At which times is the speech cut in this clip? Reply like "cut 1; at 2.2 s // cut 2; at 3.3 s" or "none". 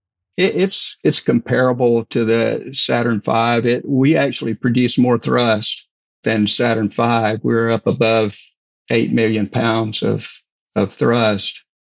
none